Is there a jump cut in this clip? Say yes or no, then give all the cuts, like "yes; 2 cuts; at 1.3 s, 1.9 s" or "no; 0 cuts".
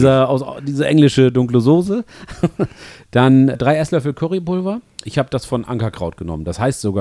no; 0 cuts